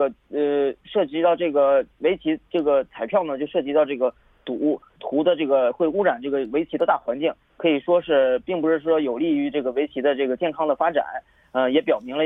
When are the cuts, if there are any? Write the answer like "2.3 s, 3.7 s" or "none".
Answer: none